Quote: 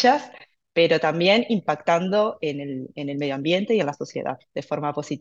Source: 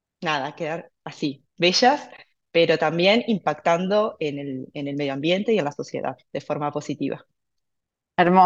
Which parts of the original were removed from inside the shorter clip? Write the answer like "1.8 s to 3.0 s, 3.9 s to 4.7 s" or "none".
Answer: none